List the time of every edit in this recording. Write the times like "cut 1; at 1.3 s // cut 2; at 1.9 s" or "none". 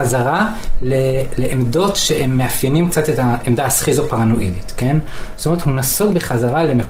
none